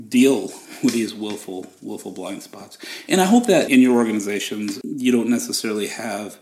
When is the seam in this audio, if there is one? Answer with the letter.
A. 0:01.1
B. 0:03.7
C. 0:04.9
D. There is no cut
B